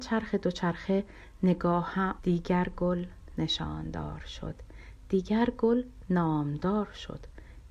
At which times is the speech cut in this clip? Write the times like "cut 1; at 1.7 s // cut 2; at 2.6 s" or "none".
cut 1; at 2.2 s